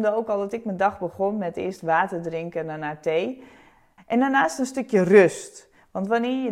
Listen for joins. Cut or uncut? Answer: cut